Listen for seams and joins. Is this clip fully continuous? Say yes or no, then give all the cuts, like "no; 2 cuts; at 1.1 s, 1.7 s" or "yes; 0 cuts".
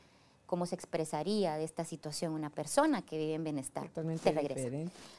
yes; 0 cuts